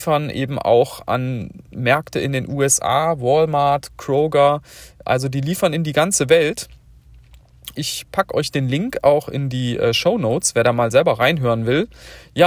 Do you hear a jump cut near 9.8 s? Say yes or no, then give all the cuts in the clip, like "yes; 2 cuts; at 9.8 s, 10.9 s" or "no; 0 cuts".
no; 1 cut; at 7.7 s